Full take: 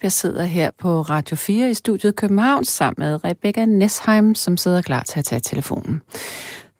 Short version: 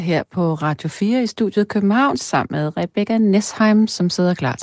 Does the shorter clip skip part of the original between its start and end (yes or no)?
no